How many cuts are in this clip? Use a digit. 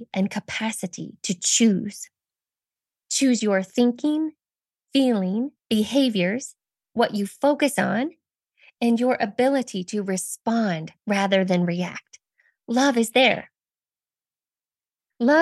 1